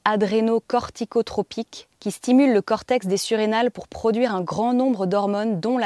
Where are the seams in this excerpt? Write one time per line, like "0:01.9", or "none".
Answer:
0:02.0